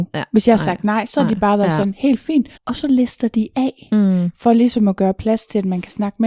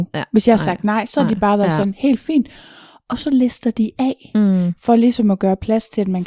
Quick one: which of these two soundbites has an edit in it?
first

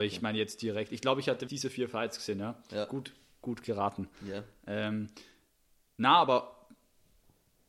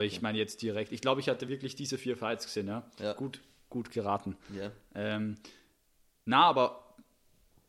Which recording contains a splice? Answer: first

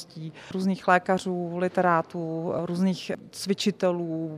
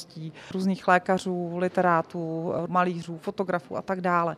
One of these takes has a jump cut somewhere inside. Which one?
second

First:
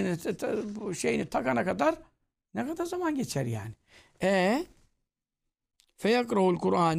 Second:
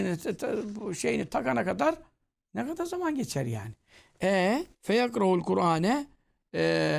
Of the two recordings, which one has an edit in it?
second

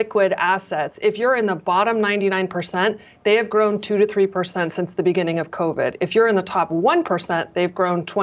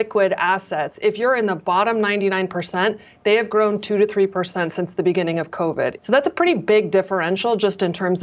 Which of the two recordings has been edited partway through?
second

